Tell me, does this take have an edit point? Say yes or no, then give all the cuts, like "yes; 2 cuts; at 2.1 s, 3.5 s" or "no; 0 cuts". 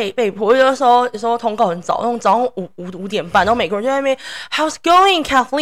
no; 0 cuts